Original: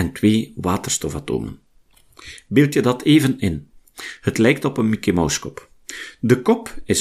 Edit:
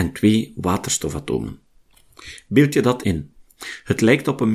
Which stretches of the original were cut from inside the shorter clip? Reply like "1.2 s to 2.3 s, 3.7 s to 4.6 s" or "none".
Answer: 3.0 s to 3.4 s